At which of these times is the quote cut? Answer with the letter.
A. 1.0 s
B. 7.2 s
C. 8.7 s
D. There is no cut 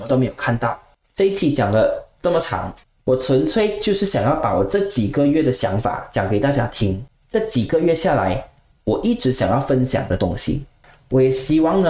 C